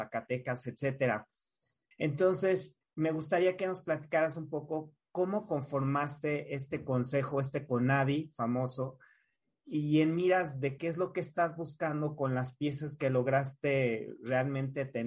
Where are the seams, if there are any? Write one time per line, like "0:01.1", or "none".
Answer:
0:01.9
0:10.8

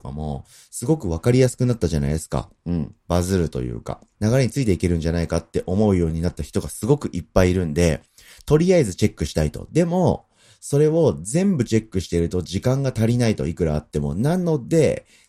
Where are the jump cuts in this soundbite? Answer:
0:04.1

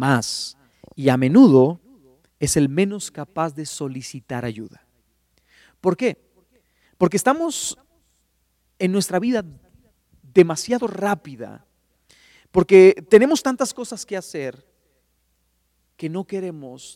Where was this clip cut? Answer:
none

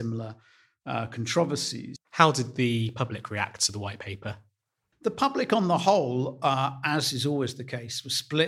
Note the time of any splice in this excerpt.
0:02.0

